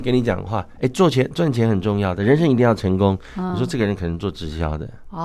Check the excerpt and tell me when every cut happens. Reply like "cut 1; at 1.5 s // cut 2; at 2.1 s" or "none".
none